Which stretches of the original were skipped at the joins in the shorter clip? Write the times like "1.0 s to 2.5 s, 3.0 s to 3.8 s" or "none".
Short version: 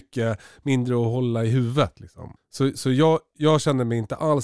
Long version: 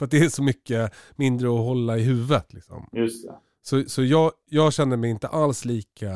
2.9 s to 3.5 s